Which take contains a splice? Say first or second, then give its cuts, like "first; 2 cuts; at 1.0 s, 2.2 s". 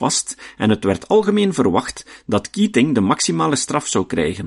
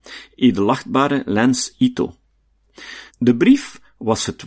second; 1 cut; at 3.1 s